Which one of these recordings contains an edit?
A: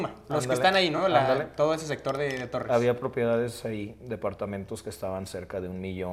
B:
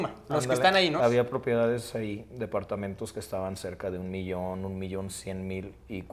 B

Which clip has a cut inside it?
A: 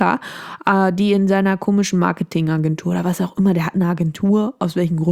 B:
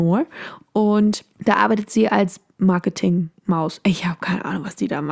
B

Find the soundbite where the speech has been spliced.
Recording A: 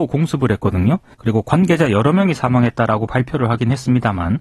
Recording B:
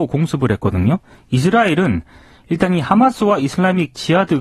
A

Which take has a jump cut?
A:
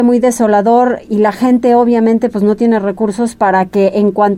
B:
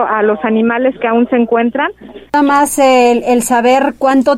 B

